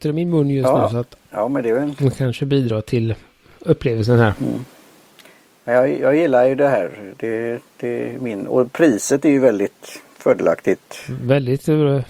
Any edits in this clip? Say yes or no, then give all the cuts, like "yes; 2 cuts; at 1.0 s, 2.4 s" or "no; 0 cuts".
no; 0 cuts